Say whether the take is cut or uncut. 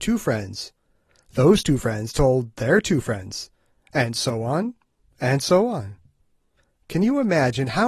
uncut